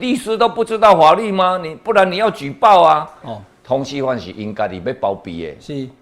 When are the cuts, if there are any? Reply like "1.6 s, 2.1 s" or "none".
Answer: 3.2 s